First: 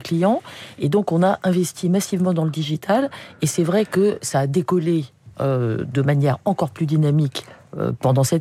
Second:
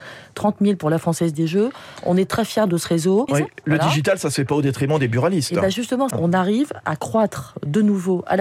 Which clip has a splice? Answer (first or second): second